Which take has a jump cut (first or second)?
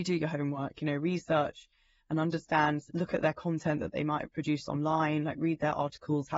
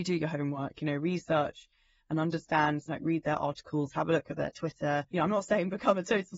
second